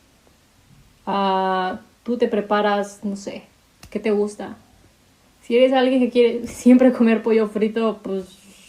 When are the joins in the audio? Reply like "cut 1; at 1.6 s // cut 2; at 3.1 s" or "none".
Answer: none